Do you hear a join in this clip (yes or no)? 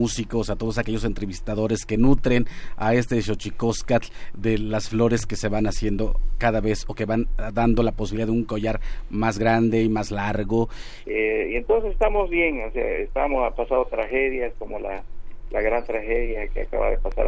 yes